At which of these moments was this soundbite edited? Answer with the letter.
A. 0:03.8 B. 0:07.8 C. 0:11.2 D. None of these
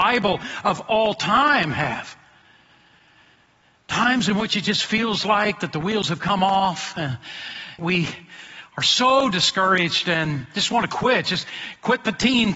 B